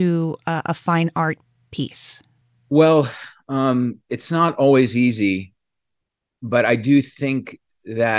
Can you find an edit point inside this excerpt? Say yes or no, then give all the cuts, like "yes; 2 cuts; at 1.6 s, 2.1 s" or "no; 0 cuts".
no; 0 cuts